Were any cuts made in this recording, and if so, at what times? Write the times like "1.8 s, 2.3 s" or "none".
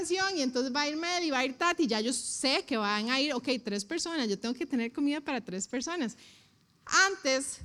none